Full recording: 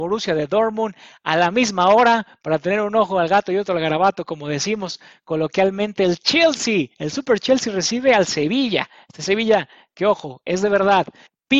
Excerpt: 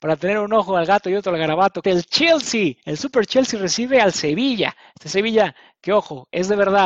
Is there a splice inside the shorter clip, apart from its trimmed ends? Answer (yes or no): yes